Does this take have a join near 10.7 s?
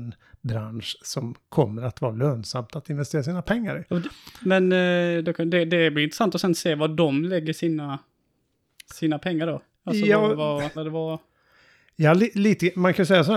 yes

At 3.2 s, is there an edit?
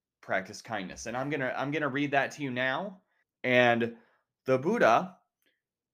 yes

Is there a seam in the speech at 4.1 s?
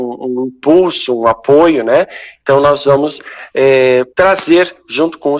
yes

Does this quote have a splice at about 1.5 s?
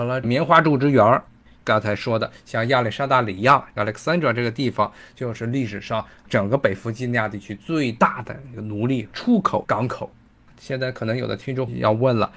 yes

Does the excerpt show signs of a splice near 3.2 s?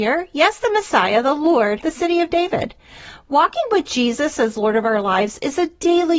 no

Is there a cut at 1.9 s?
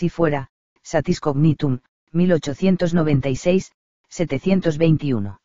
yes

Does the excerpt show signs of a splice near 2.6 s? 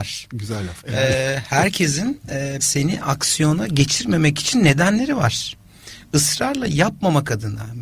yes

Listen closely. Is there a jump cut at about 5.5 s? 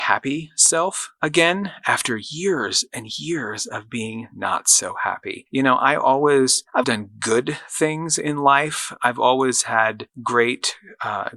no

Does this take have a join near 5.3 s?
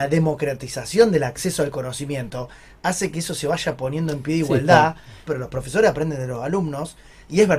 yes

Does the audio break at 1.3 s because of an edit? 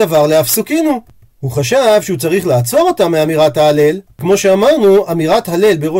no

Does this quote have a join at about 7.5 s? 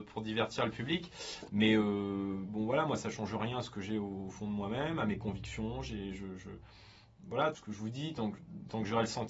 yes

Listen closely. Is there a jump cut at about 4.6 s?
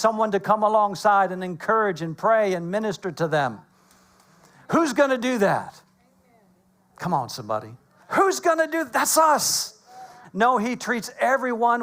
no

